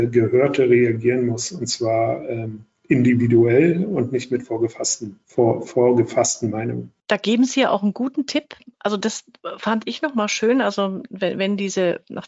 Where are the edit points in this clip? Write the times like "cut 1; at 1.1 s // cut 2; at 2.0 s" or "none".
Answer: none